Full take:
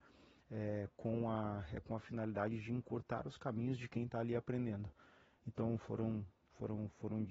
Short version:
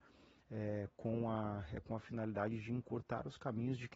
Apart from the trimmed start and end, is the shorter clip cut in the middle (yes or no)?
no